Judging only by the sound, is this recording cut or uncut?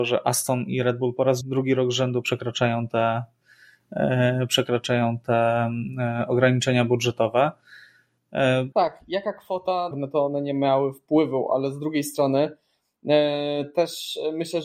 cut